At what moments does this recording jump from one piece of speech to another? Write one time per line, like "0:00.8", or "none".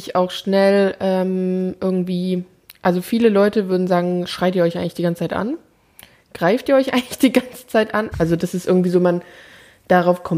0:08.1

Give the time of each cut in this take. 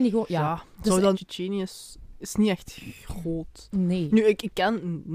0:01.1

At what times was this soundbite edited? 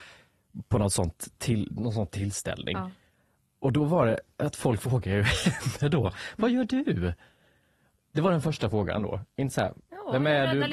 none

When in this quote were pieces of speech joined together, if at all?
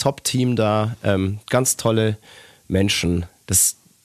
none

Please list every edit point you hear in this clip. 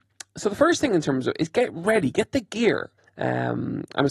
0:03.0

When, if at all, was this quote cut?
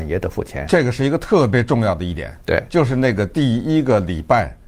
none

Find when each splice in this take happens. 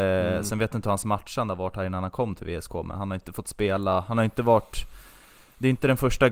none

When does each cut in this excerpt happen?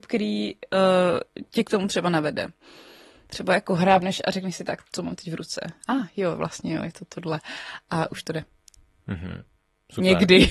none

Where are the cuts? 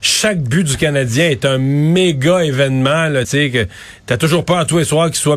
none

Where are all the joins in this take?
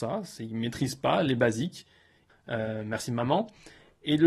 0:02.3

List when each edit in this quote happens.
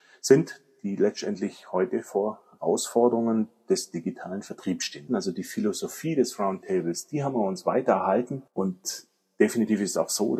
0:05.1
0:08.5

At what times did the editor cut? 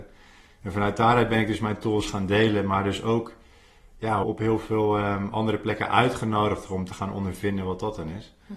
0:04.2

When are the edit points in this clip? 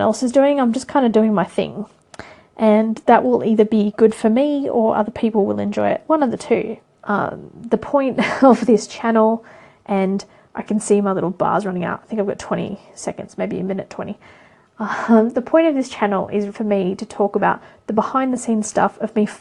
0:07.0
0:16.5

